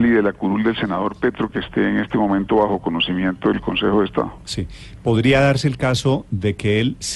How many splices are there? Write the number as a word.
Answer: one